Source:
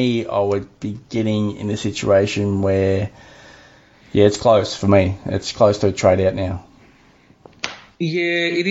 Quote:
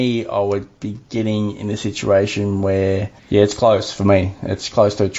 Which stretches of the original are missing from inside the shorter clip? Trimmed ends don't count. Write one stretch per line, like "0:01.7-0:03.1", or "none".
0:03.2-0:04.0